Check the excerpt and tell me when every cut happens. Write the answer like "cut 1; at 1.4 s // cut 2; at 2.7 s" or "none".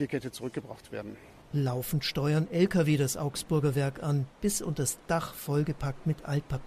none